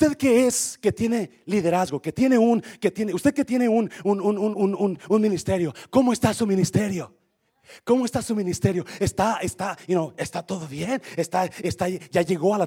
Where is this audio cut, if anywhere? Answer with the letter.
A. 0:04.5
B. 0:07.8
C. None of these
A